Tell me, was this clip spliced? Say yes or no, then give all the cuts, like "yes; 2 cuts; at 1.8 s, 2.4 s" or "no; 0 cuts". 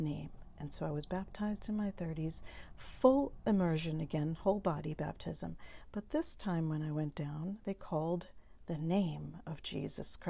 no; 0 cuts